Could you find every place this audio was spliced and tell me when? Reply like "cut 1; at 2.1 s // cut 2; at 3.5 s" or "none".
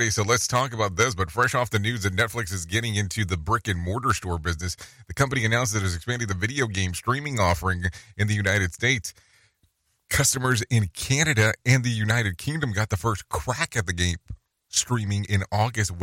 none